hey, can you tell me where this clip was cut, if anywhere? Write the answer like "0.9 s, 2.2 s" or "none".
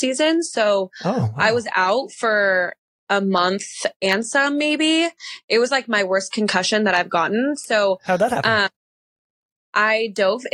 none